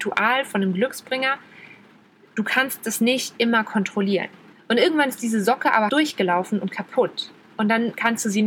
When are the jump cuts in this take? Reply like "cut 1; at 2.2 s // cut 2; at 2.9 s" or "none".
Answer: cut 1; at 4.5 s // cut 2; at 5.9 s